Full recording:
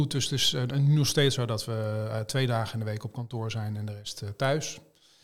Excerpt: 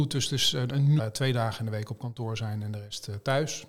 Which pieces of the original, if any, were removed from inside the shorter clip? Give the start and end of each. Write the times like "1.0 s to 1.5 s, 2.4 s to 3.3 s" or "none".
1.0 s to 2.1 s